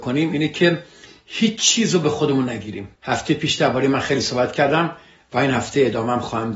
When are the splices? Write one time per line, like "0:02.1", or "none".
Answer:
0:03.0